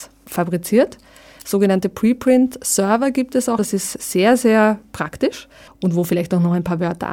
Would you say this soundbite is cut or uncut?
cut